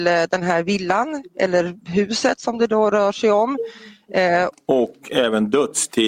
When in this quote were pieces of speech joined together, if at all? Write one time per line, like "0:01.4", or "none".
0:04.5